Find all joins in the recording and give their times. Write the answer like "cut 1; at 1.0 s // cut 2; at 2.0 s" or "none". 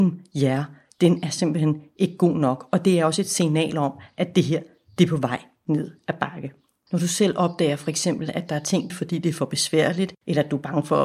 cut 1; at 6.9 s // cut 2; at 8.9 s